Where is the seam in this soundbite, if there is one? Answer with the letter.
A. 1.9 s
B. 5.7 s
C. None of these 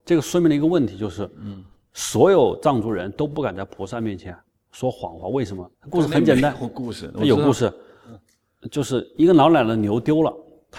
B